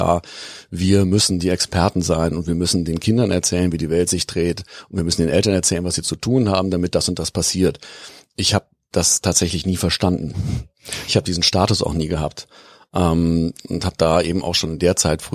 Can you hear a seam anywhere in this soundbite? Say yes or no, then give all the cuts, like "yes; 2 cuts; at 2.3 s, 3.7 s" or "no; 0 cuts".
no; 0 cuts